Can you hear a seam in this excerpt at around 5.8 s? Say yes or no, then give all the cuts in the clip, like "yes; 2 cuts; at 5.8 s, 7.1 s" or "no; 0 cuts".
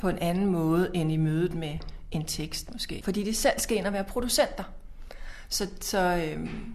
no; 1 cut; at 3.0 s